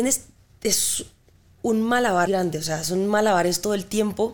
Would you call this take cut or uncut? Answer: cut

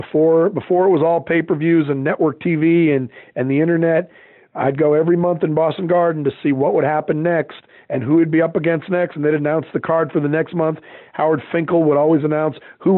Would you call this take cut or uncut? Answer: uncut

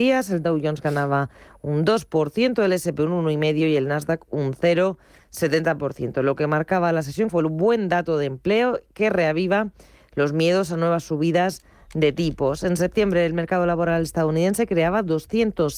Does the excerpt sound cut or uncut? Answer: cut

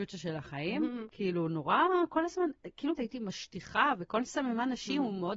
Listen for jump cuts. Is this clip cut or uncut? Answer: cut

